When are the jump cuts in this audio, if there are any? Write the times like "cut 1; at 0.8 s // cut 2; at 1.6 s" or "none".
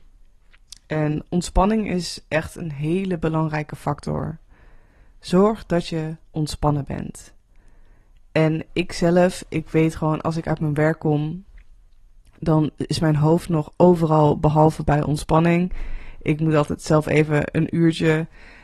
none